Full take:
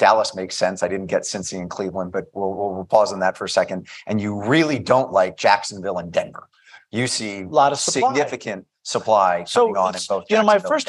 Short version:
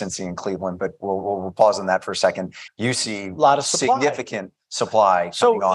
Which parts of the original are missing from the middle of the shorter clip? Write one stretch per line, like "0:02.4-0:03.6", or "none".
0:04.0-0:06.8